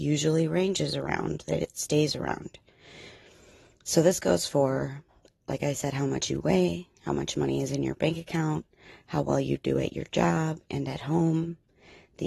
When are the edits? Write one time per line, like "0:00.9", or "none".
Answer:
none